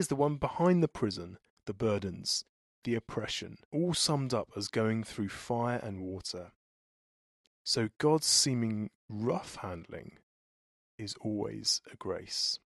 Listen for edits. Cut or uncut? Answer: cut